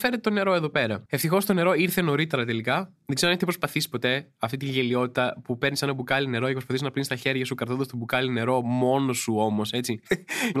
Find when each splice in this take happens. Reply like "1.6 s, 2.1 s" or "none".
1.1 s